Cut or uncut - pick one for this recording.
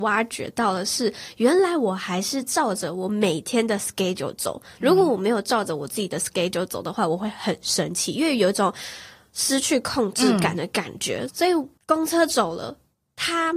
cut